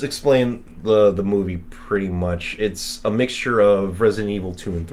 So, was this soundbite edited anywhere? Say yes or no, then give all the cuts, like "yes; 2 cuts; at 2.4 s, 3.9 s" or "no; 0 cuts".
no; 0 cuts